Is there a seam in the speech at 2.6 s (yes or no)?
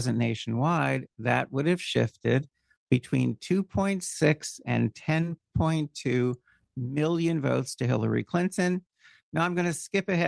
no